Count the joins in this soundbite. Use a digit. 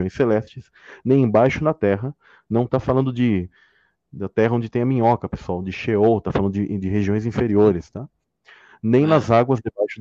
0